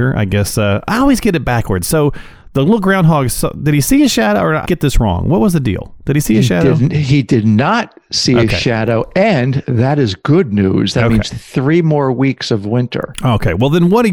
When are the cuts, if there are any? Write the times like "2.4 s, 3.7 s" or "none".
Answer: 4.6 s